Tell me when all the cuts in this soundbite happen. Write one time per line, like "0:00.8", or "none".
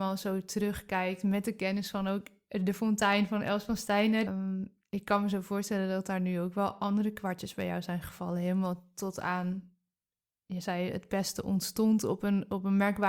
0:04.3